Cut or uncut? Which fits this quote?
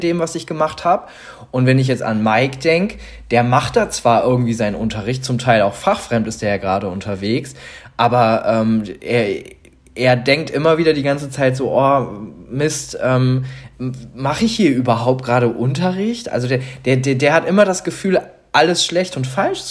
uncut